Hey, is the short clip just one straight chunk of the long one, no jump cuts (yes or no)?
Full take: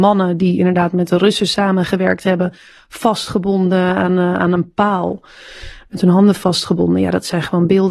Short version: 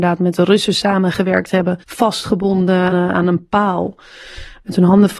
no